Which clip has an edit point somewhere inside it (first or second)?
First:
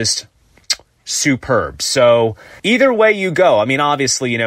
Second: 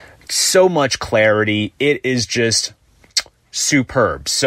first